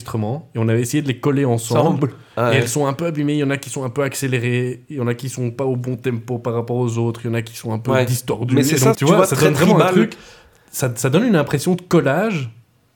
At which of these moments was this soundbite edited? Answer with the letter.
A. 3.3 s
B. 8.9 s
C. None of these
B